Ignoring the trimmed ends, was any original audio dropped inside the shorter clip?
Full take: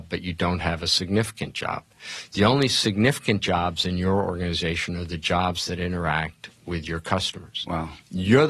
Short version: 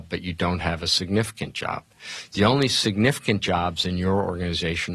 no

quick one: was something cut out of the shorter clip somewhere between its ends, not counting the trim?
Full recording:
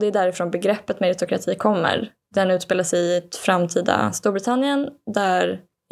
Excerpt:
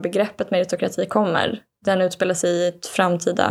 no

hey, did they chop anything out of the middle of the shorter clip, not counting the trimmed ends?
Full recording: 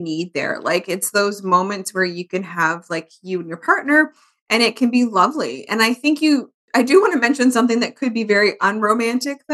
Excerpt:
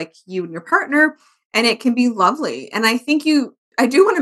no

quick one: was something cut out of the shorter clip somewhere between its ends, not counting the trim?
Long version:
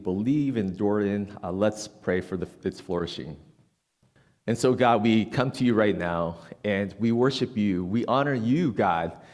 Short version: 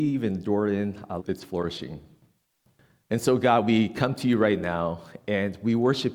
yes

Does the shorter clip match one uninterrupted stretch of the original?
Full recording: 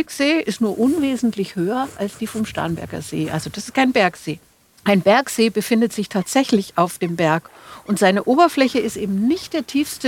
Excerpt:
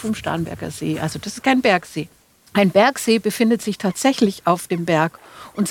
yes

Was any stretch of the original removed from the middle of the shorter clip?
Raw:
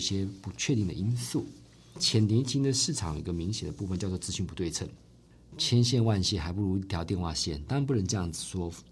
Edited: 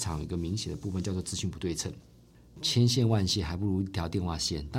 no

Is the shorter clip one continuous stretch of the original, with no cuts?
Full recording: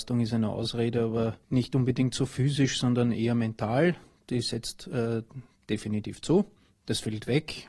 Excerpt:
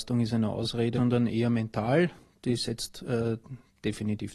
no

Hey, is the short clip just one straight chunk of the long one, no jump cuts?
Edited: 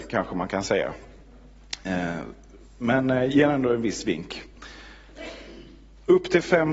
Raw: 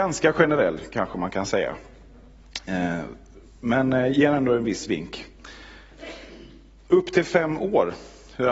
yes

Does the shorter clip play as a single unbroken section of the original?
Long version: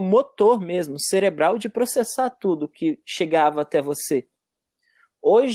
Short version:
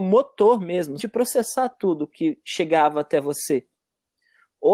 no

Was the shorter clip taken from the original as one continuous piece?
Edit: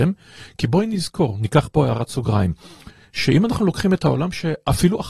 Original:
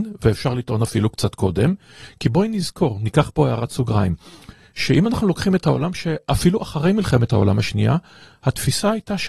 yes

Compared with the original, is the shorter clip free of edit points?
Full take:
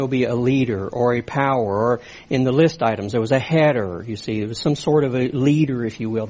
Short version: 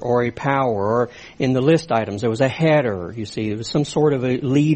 yes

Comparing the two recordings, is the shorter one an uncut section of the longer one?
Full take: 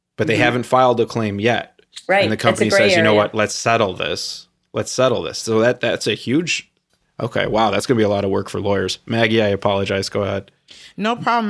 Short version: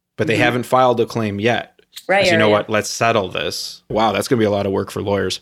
no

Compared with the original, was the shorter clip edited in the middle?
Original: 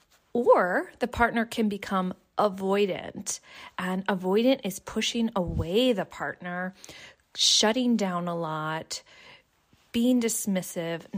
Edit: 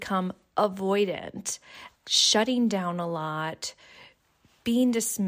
yes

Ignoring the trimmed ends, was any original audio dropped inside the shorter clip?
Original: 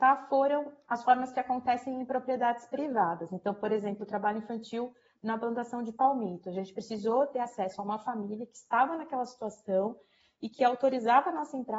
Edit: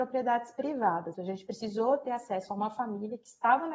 yes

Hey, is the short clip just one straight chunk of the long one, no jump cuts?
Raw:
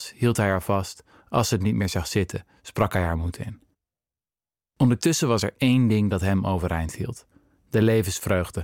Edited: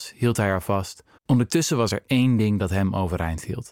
no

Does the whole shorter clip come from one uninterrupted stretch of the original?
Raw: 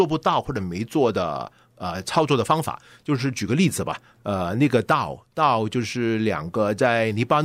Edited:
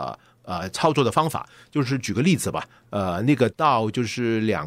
no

